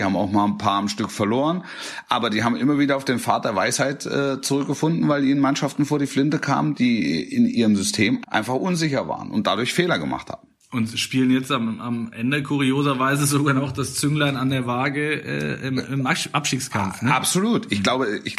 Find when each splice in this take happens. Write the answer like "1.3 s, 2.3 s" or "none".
8.2 s